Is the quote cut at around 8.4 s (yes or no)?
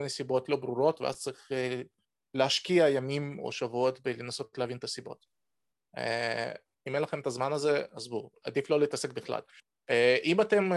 yes